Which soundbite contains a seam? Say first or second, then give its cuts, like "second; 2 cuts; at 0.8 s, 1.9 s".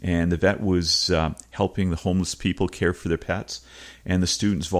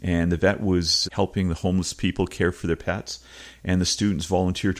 second; 1 cut; at 1.0 s